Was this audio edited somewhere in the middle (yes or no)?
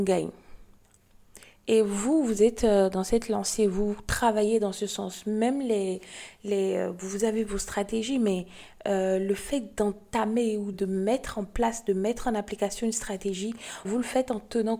yes